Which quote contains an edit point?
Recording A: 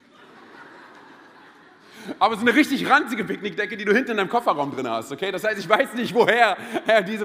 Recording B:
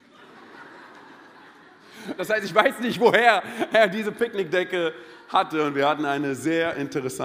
B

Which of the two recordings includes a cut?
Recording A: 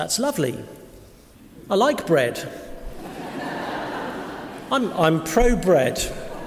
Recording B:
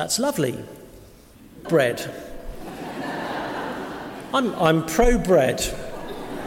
B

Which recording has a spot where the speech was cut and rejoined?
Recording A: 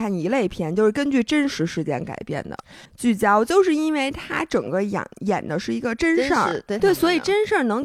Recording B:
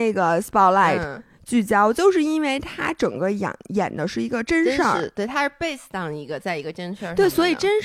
A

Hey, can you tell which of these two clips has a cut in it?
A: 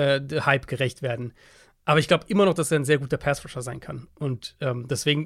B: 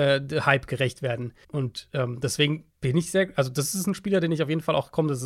B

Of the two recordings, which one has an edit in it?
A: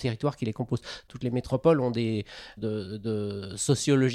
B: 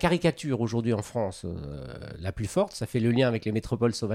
A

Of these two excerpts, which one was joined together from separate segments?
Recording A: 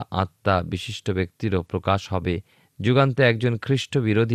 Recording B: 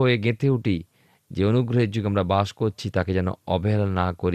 A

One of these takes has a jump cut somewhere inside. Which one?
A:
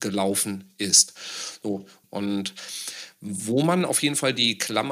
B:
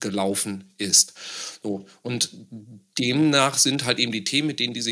A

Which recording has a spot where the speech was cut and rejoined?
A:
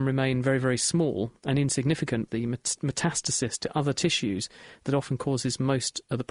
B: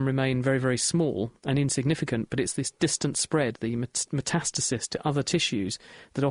A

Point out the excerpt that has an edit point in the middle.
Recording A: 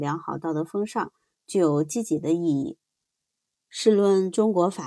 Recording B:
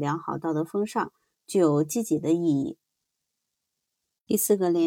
A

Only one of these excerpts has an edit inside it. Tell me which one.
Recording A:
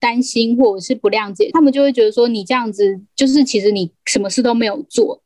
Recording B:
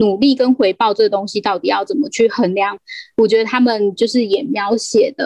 A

